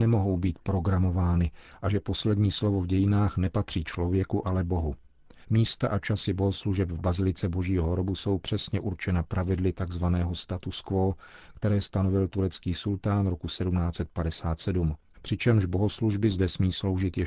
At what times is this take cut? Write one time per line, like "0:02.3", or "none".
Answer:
0:05.4
0:15.1